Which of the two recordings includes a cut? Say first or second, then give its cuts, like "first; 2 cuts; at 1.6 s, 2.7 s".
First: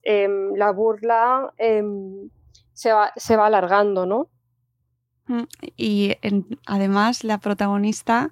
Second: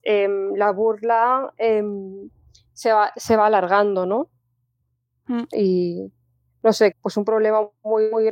second; 2 cuts; at 5.5 s, 6.9 s